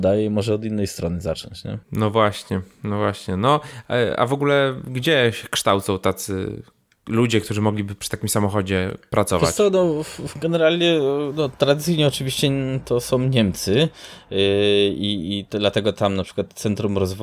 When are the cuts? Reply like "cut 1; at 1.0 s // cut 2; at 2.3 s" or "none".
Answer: cut 1; at 1.8 s